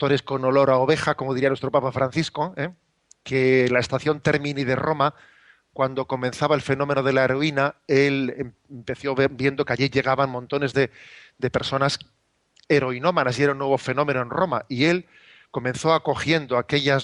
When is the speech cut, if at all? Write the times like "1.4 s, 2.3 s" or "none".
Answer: none

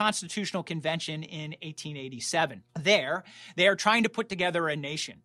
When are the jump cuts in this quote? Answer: 2.7 s

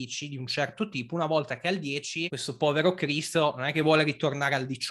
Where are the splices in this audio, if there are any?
2.3 s

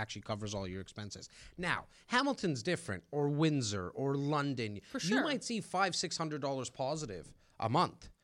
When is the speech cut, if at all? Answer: 3.9 s

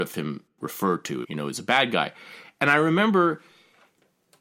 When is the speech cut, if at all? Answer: 1.2 s

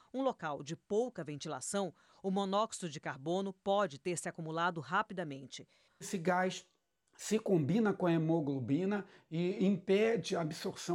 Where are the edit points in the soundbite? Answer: 5.9 s

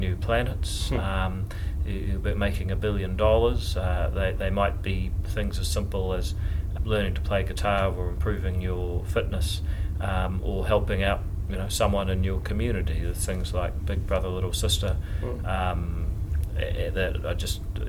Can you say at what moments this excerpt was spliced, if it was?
6.8 s

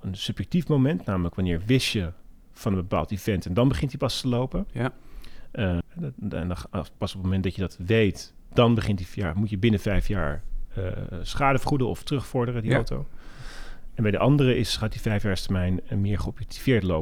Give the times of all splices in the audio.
5.8 s

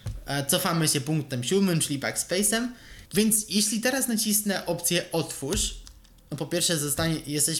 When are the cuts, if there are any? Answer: 3.1 s

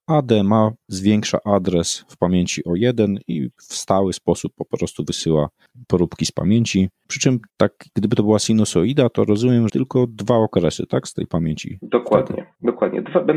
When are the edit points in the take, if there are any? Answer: 9.7 s

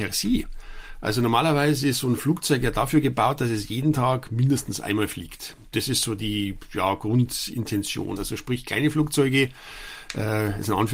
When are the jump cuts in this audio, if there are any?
8.2 s

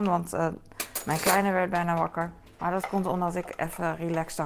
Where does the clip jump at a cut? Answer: 2.6 s

